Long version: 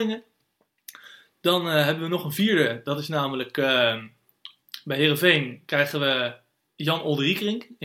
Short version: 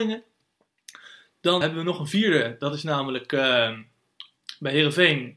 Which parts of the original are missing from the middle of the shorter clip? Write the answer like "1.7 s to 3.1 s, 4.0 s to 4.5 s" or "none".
1.6 s to 1.9 s